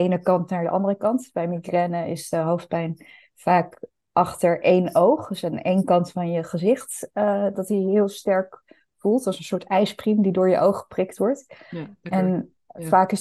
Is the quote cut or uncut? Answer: uncut